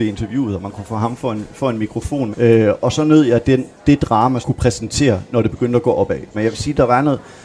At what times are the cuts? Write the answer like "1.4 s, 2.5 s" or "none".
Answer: 2.3 s, 4.4 s, 6.3 s

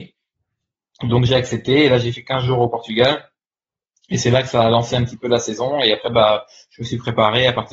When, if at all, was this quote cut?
none

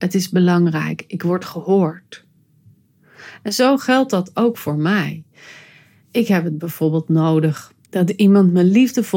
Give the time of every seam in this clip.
7.8 s

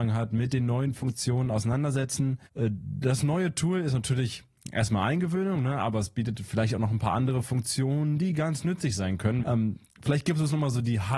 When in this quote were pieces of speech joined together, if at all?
2.5 s, 9.4 s

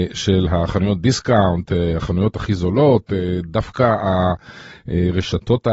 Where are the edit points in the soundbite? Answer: none

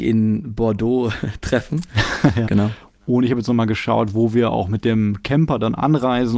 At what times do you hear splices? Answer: 2.5 s

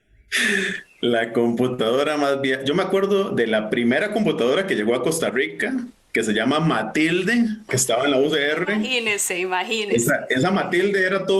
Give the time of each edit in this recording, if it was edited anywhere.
7.7 s

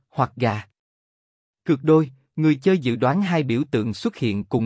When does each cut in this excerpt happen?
none

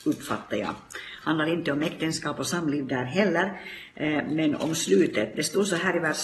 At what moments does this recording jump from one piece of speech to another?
none

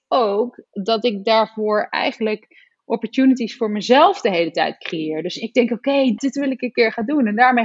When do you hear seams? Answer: 6.2 s

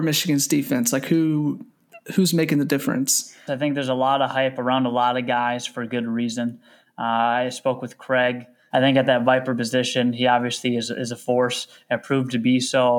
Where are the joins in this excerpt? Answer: 3.5 s, 8.7 s

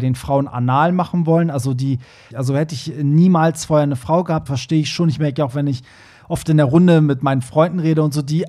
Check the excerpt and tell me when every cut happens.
2.3 s, 4.5 s

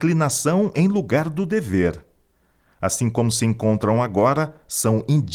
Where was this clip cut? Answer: none

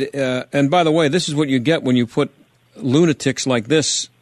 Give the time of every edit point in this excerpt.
none

